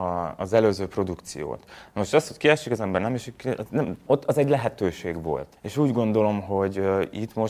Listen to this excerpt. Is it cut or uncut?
cut